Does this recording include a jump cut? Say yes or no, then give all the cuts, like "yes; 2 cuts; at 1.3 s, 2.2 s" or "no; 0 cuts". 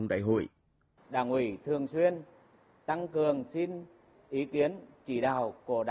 yes; 1 cut; at 1.0 s